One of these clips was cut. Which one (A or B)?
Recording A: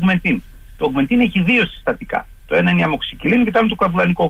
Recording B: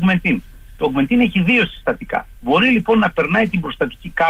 B